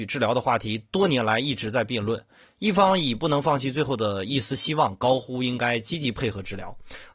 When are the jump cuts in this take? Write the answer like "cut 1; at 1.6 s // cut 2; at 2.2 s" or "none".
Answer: none